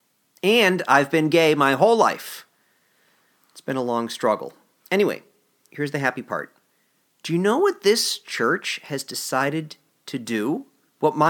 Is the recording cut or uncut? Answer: cut